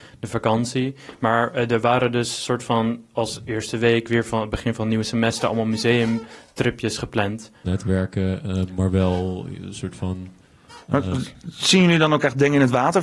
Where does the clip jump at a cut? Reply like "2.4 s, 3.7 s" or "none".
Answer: 7.6 s